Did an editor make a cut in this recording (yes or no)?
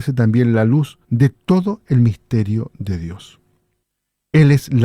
no